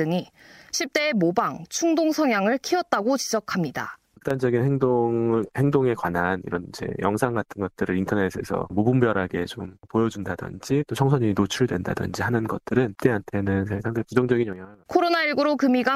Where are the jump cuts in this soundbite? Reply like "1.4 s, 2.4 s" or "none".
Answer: 4.1 s